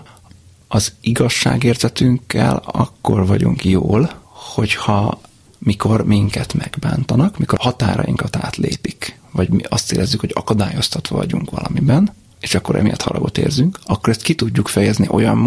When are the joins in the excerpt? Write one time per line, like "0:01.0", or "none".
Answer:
none